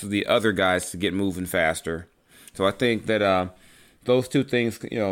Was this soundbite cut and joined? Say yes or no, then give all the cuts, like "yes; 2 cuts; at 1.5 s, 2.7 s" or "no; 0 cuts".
no; 0 cuts